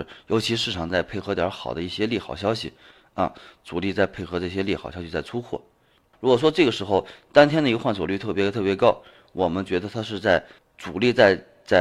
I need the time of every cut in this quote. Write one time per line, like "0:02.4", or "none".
0:06.1
0:10.6